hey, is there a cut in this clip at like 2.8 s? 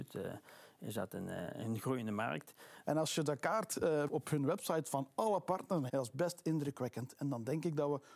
yes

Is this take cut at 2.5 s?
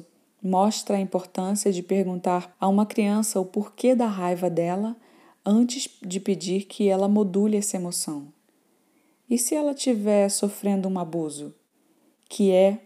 yes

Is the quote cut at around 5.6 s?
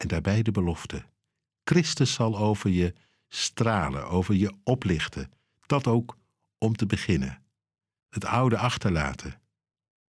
no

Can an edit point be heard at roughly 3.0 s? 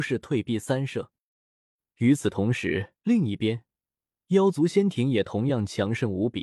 yes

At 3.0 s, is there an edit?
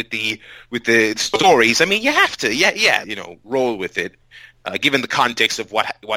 yes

